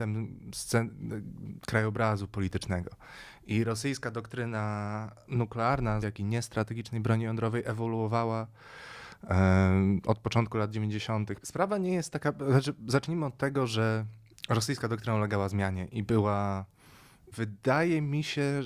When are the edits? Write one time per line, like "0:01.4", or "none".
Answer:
0:06.0
0:11.4
0:17.3